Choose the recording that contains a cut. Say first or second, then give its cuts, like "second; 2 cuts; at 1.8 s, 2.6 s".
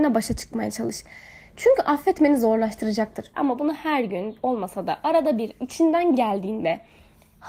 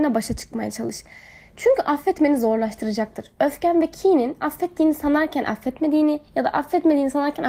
first; 1 cut; at 3.3 s